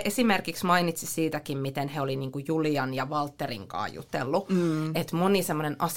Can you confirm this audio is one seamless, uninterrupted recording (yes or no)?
yes